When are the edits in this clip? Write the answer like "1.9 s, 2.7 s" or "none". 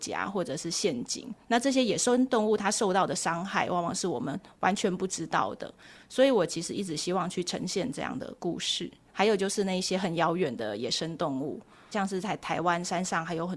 9.1 s, 11.9 s